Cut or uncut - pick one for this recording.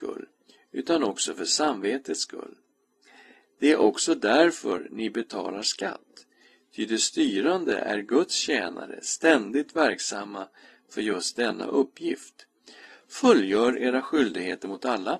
uncut